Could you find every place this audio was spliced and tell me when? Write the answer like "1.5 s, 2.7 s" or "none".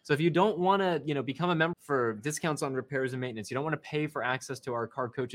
1.7 s